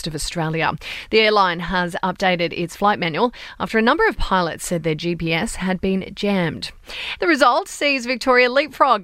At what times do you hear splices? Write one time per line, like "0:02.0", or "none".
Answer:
0:07.2